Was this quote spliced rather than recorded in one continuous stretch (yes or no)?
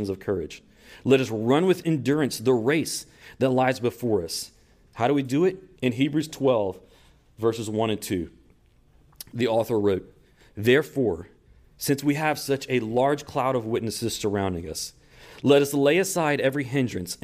yes